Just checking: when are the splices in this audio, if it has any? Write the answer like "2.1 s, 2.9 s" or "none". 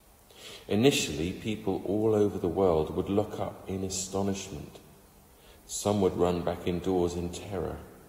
5.6 s